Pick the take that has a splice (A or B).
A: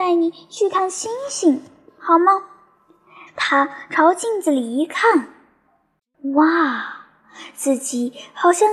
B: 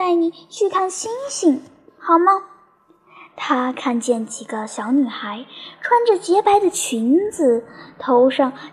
A